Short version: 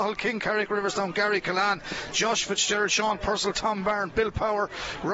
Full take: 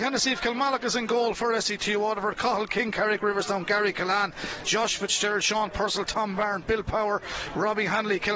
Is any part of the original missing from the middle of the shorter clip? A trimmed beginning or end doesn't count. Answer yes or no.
no